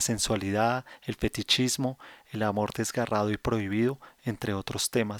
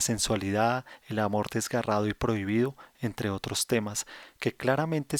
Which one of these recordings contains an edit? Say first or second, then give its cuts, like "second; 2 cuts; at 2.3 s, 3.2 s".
second; 1 cut; at 1.0 s